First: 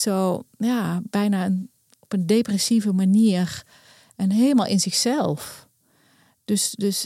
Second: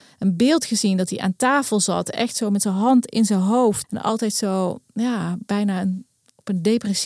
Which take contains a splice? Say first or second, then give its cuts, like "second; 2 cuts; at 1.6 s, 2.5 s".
second; 1 cut; at 3.8 s